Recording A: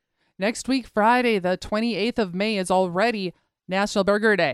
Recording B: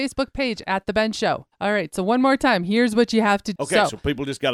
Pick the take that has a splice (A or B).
B